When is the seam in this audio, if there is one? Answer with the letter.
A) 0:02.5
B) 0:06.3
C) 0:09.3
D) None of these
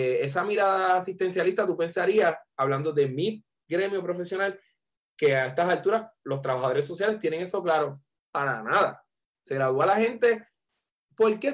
D